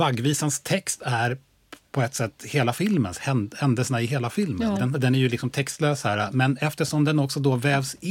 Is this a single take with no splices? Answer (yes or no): no